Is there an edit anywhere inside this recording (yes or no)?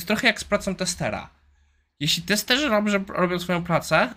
no